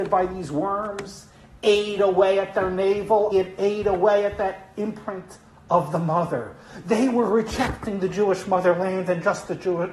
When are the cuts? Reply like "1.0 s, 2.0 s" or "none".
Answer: 3.3 s